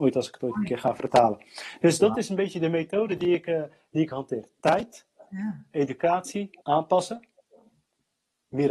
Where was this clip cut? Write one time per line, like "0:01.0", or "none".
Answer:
0:06.6

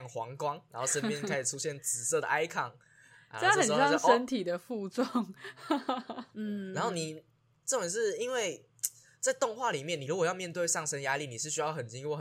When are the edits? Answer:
0:06.3

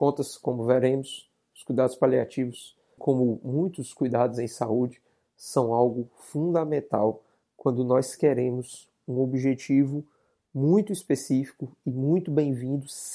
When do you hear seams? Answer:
0:03.0

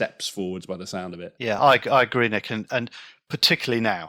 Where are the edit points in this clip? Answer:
none

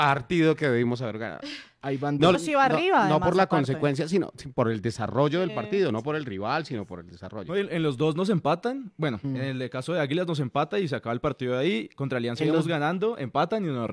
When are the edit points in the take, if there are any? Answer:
0:02.3

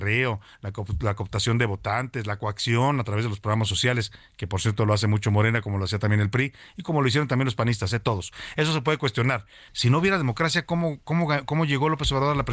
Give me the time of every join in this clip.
0:09.7

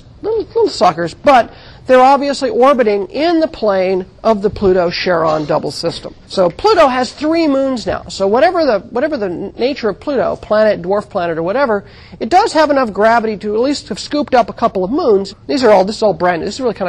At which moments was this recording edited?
0:06.2
0:15.3

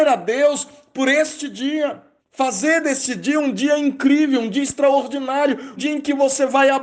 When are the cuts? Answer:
0:02.2
0:05.8

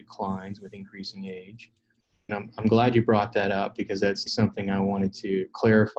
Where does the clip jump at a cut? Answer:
0:02.3
0:04.3

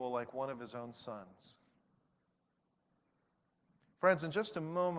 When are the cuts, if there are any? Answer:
none

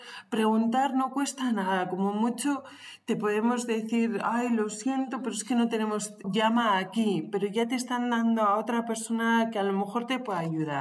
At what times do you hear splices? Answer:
0:06.2

